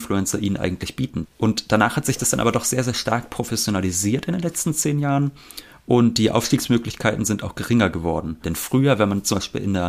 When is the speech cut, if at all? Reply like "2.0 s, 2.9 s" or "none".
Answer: 1.3 s, 8.4 s